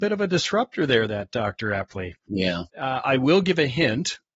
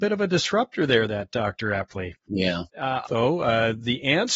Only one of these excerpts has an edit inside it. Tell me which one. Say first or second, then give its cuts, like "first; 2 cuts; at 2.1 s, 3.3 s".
second; 1 cut; at 3.0 s